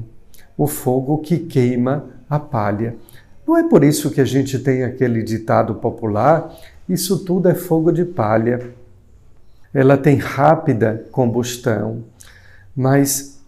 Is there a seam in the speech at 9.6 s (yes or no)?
yes